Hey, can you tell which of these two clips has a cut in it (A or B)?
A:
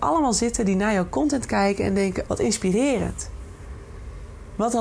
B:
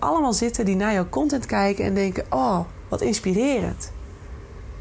A